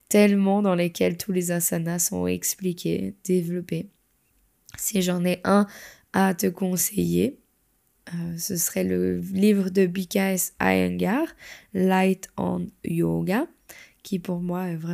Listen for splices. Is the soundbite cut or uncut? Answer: uncut